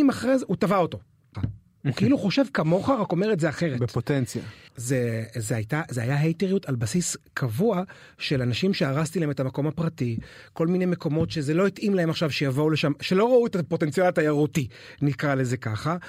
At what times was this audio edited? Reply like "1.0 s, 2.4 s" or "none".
1.3 s, 4.7 s